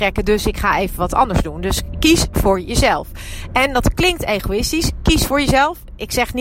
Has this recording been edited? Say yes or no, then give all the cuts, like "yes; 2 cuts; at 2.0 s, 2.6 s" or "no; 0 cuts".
no; 0 cuts